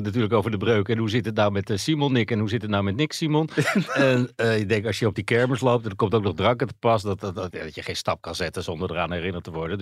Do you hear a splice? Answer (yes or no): yes